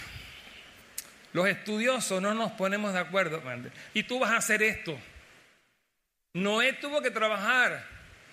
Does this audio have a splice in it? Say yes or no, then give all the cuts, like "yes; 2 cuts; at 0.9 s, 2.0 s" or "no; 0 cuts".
yes; 1 cut; at 3.9 s